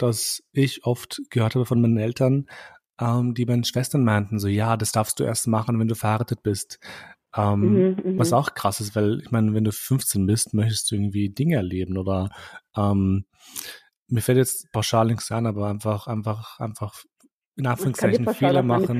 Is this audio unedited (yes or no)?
yes